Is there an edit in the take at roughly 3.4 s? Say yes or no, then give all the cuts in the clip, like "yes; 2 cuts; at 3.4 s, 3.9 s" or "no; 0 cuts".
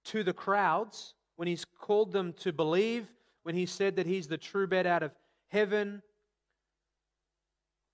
yes; 1 cut; at 3.4 s